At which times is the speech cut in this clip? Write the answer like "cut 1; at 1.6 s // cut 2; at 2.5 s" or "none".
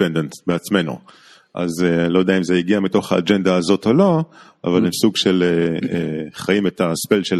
none